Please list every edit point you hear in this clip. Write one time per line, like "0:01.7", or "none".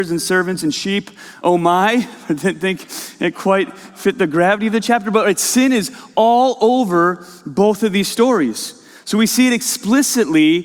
none